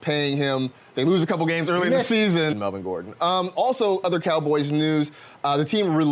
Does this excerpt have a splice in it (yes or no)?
yes